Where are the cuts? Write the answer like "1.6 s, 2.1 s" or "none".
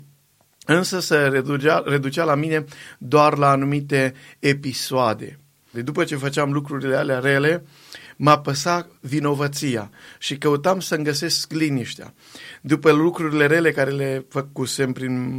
5.7 s

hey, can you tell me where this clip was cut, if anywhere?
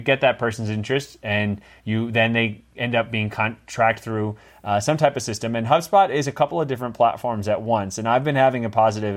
none

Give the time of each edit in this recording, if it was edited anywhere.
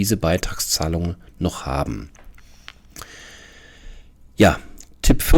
none

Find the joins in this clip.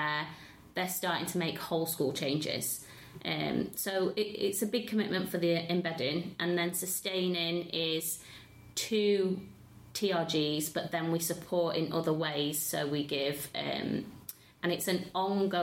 14.6 s

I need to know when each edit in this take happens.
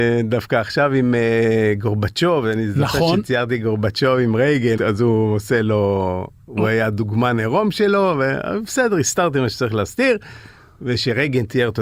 4.8 s

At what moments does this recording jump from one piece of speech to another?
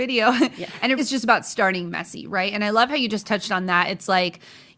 1.0 s

